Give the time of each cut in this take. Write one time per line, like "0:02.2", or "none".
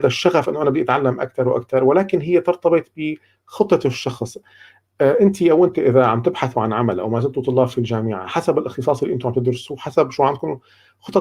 none